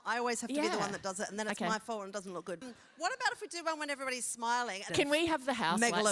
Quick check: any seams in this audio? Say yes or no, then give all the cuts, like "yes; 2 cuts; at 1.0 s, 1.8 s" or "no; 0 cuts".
yes; 2 cuts; at 2.6 s, 4.9 s